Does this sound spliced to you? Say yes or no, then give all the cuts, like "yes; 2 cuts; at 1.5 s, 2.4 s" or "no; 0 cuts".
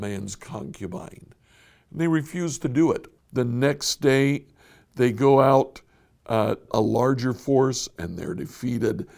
yes; 2 cuts; at 3.2 s, 6.7 s